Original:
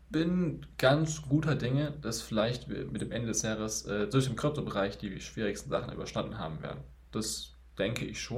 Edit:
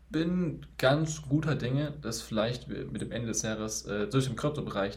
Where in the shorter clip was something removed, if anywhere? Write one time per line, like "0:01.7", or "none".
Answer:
none